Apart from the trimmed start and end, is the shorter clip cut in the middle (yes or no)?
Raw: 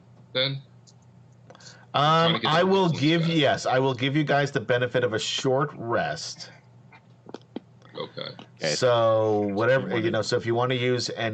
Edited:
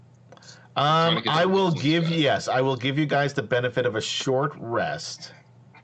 no